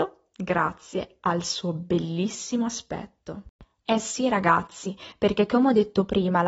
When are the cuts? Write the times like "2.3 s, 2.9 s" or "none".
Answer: none